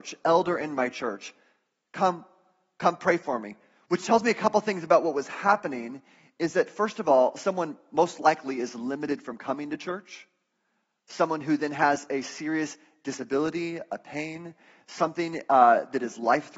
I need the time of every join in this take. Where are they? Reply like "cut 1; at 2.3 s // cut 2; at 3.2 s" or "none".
none